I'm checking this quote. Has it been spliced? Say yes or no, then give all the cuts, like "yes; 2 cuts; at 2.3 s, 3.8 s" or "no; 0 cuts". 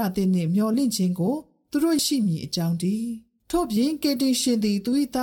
yes; 1 cut; at 2.0 s